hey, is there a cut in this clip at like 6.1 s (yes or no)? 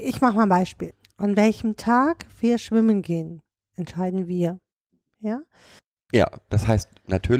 yes